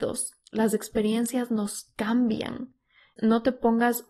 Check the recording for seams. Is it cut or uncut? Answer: cut